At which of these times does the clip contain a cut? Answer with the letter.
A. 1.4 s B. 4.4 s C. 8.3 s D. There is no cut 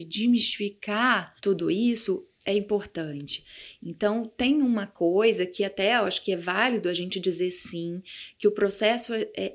A